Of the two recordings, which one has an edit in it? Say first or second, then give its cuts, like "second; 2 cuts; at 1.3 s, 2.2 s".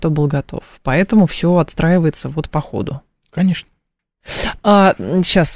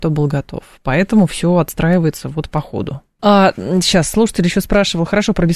second; 1 cut; at 3.2 s